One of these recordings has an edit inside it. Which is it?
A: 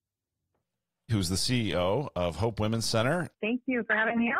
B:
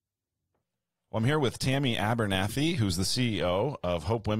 A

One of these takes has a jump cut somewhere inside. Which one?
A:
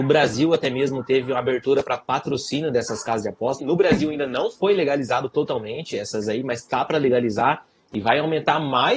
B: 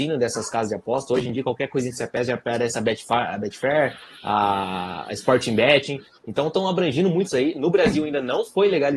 A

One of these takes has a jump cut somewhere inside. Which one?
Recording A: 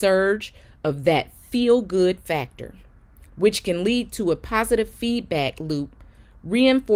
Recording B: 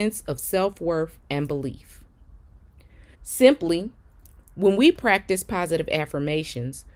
B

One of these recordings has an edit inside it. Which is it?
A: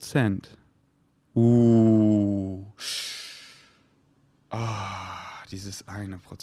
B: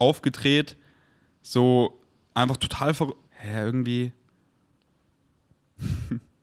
B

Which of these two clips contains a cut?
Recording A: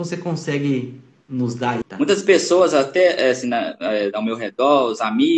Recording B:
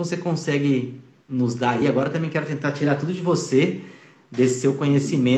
A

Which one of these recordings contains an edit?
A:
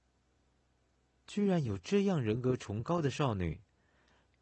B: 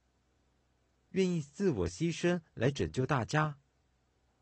B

